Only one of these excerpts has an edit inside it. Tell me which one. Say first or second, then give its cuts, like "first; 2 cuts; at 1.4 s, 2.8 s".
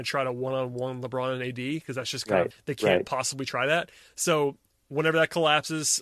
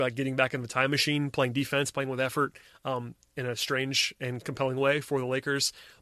first; 1 cut; at 2.5 s